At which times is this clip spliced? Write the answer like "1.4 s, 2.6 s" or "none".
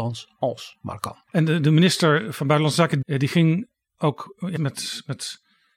1.3 s, 3.0 s, 4.6 s

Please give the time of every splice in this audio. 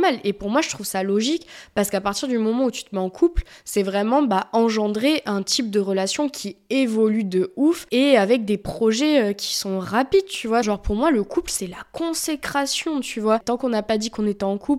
10.6 s, 13.4 s

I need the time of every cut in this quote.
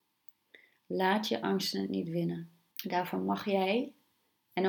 2.7 s

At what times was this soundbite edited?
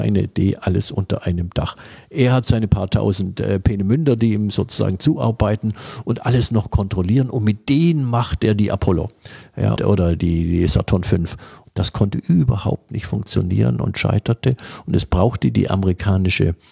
9.8 s

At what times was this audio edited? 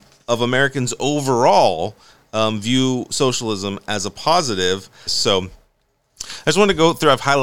5.1 s

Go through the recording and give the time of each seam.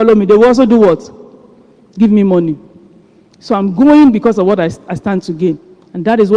none

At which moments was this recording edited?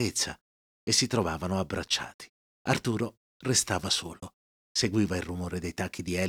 2.5 s

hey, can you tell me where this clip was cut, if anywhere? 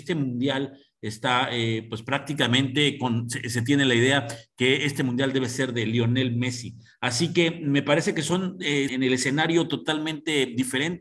8.9 s

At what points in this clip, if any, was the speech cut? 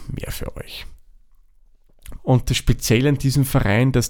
2.2 s

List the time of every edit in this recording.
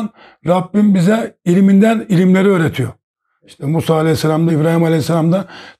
4.5 s

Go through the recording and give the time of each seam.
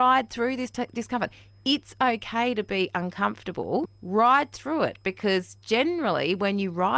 3.8 s

